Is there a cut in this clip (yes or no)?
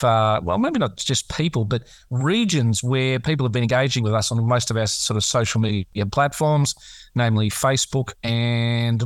no